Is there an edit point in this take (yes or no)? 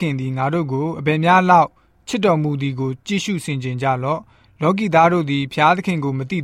no